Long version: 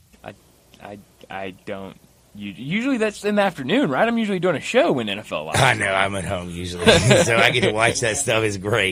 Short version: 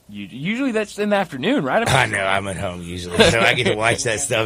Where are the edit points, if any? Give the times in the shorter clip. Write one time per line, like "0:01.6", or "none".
0:01.8
0:03.3